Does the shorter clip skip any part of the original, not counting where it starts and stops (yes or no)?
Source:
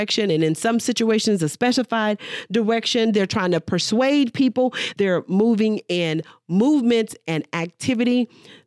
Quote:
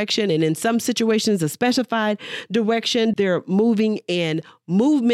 yes